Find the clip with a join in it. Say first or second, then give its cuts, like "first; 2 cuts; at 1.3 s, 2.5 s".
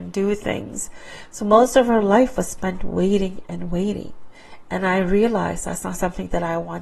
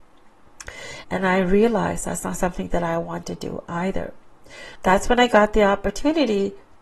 second; 2 cuts; at 1.0 s, 4.8 s